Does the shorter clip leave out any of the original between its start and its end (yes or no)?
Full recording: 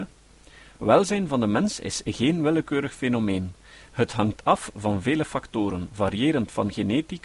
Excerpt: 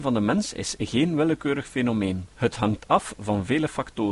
yes